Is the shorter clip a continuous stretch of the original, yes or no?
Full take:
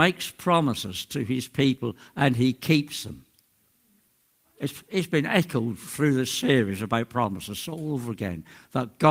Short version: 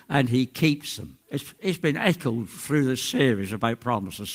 no